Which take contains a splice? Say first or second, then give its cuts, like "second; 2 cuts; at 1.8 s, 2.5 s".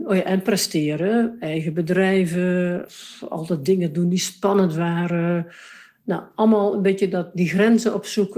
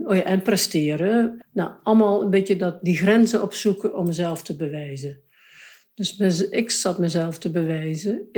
second; 1 cut; at 1.4 s